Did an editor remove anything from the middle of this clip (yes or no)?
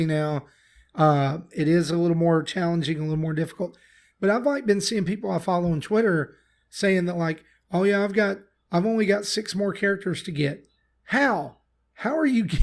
no